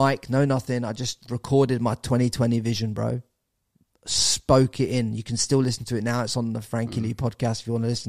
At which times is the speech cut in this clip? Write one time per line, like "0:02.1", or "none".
none